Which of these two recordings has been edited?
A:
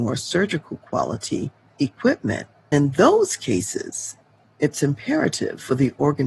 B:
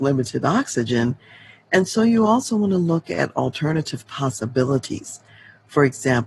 A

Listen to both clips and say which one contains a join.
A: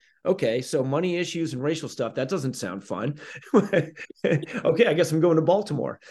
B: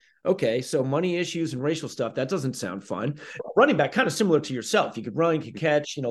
B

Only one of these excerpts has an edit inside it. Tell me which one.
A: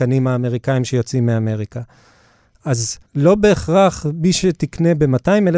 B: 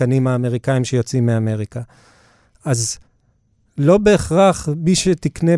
A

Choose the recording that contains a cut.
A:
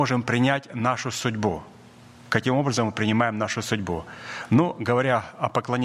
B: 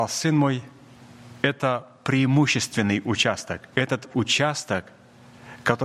B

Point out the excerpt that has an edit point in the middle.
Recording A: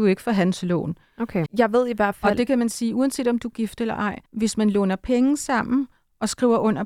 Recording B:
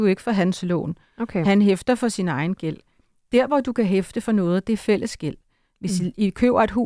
A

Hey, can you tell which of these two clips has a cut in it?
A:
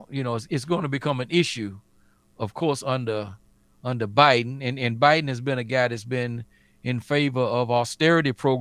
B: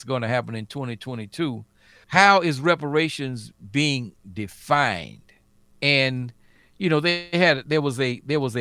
B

